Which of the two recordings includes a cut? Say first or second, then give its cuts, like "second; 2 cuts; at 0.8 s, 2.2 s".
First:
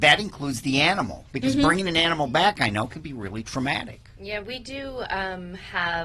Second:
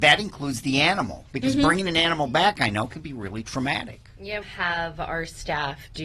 second; 1 cut; at 4.4 s